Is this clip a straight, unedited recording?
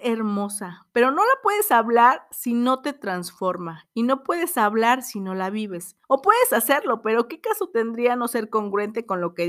no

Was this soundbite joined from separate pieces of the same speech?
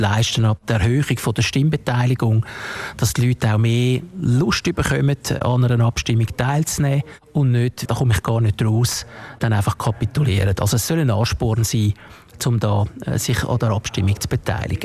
yes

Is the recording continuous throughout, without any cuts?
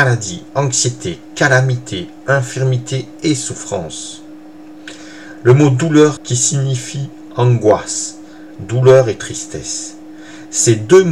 no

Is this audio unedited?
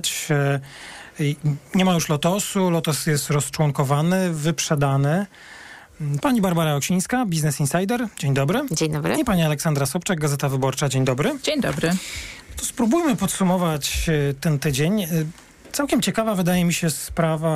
no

